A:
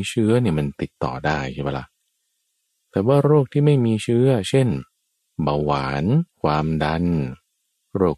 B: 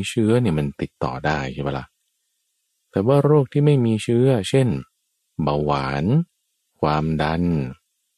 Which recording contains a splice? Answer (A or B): A